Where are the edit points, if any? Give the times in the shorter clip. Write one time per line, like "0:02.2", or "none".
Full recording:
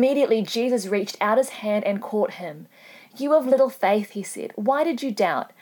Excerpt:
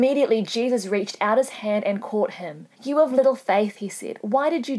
0:02.7